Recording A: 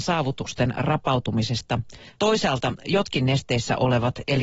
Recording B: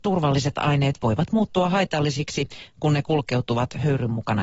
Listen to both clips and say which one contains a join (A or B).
A